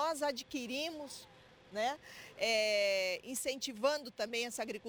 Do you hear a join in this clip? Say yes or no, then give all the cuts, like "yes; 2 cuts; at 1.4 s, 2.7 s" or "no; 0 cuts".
no; 0 cuts